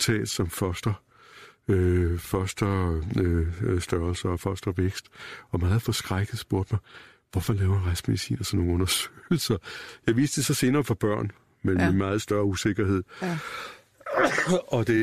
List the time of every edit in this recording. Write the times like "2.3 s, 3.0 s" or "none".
none